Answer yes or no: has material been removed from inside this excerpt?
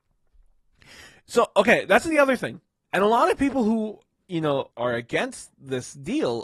yes